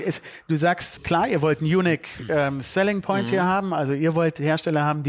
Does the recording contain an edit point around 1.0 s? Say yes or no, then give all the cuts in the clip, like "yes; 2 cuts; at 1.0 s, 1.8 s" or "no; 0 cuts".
yes; 1 cut; at 1.0 s